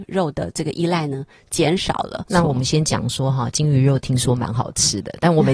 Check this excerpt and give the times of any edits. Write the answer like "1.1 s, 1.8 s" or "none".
2.3 s